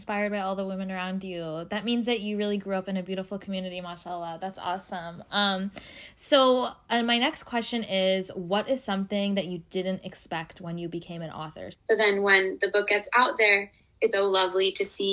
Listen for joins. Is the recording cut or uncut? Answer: cut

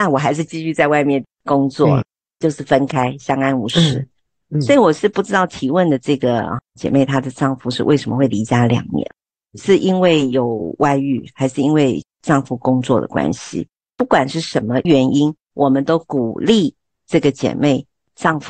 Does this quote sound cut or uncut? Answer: uncut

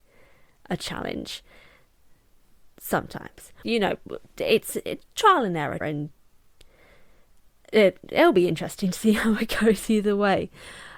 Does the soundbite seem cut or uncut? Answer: cut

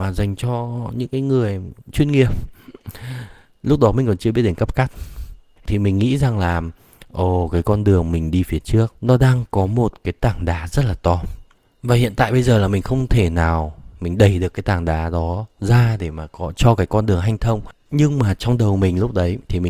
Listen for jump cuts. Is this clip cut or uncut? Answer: cut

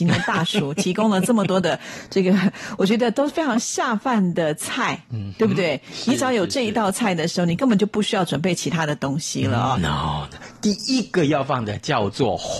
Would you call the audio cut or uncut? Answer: cut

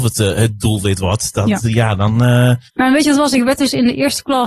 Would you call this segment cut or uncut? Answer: cut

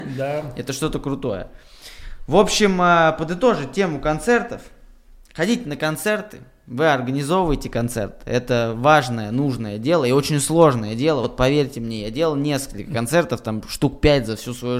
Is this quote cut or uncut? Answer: uncut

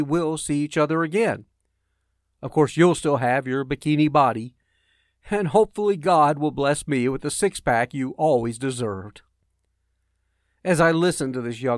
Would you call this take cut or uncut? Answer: uncut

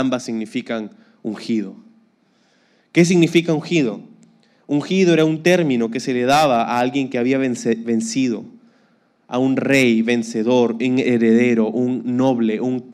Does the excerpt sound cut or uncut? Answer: uncut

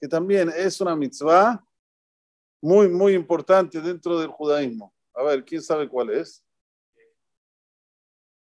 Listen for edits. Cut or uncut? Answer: uncut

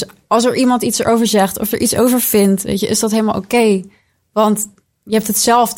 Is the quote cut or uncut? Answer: uncut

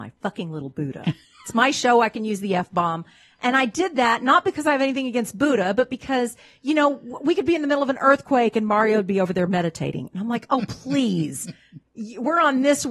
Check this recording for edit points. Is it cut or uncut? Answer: uncut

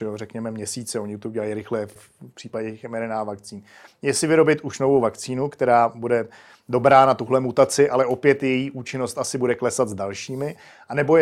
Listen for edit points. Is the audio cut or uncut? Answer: cut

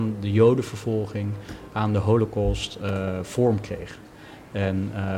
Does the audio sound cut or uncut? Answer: uncut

